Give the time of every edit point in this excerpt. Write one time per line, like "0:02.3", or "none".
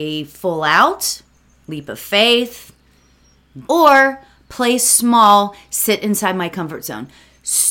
0:03.7